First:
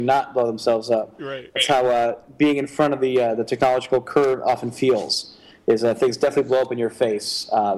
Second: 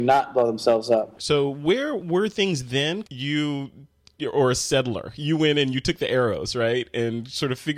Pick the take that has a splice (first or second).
second